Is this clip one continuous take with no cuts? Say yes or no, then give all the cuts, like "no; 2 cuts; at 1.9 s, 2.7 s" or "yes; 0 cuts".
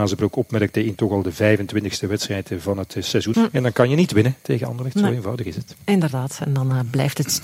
no; 1 cut; at 3.3 s